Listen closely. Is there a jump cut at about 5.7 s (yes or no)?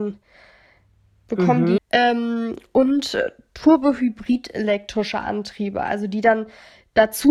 no